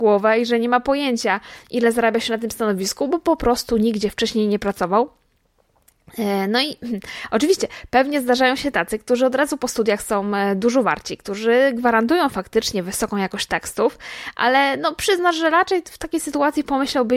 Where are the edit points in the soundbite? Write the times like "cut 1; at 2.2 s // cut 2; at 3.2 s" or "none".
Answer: none